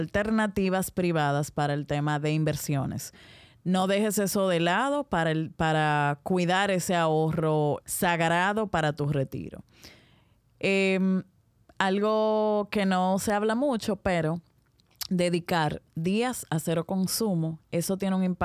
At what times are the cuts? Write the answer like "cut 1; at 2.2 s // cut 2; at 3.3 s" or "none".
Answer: cut 1; at 7.8 s